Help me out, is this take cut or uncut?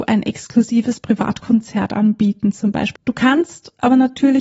cut